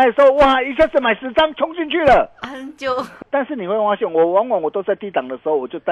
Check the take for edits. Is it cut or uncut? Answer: cut